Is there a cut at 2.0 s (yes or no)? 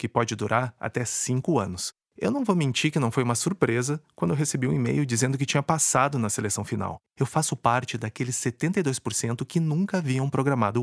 yes